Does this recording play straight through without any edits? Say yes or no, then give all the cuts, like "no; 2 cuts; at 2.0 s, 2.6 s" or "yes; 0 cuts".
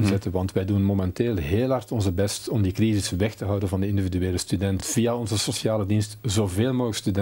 yes; 0 cuts